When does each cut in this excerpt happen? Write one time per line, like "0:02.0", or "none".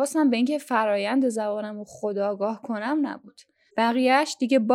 0:03.7

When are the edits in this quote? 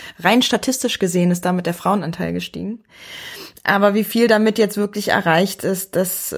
none

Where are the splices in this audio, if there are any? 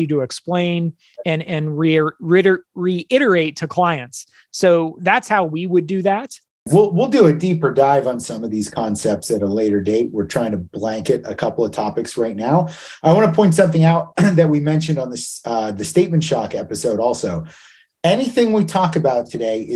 none

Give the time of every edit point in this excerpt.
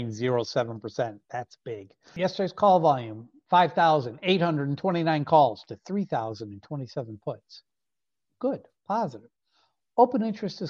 none

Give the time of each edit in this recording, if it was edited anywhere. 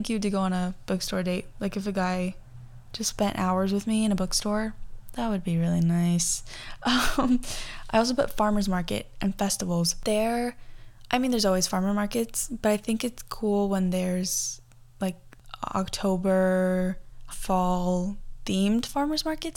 0:17.3

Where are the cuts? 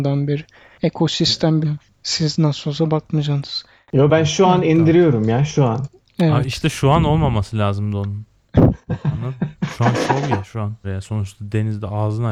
0:01.6
0:10.8

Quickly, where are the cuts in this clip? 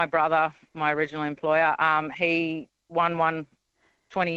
none

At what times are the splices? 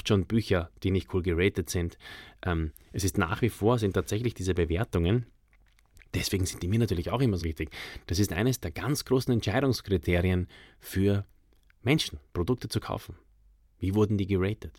0:07.4
0:12.3

